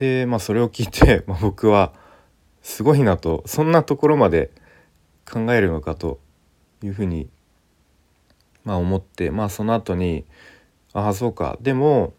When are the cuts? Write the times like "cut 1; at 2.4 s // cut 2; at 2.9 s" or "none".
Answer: none

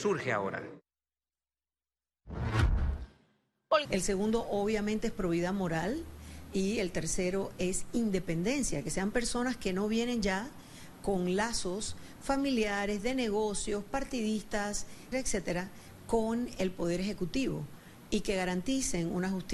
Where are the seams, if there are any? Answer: cut 1; at 3.8 s // cut 2; at 15.1 s

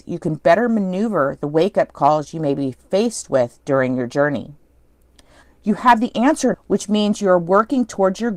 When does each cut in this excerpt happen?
cut 1; at 5.4 s // cut 2; at 6.5 s

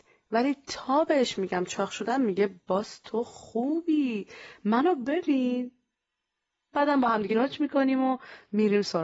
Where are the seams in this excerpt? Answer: cut 1; at 7.3 s

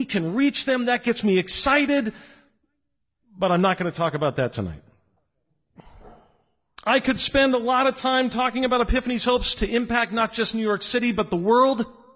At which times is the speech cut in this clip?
none

